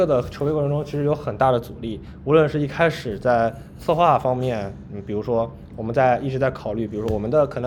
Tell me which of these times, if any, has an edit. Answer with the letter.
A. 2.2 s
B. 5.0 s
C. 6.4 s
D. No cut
D